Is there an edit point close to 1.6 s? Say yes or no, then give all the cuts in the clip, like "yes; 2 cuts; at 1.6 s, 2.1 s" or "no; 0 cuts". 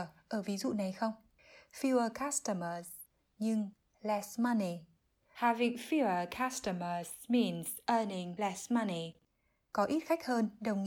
no; 1 cut; at 5.3 s